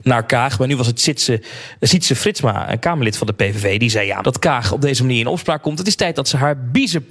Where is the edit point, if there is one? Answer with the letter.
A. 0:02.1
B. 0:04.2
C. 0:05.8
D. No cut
B